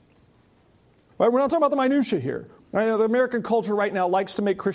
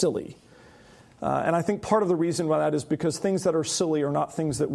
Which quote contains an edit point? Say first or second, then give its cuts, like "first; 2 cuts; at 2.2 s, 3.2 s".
first; 2 cuts; at 1.1 s, 2.6 s